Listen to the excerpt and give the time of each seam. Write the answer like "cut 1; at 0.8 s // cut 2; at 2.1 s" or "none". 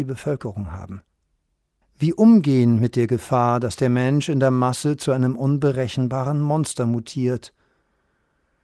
cut 1; at 1.8 s